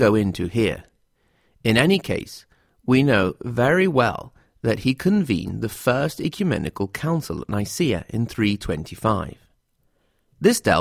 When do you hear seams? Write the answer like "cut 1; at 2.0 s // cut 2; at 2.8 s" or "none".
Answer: none